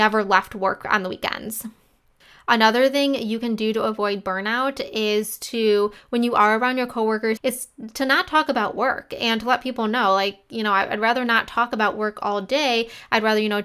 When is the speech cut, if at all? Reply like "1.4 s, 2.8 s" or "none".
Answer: 7.4 s